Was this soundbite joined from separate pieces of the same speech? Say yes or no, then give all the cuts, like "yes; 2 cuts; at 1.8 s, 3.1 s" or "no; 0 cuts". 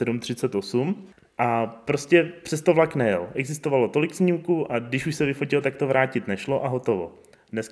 no; 0 cuts